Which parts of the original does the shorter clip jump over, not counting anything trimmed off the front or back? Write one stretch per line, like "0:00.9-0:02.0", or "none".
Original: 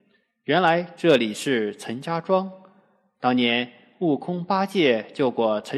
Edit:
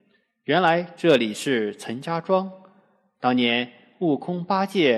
none